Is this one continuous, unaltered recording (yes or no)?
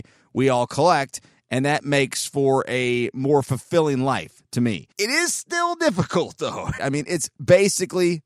no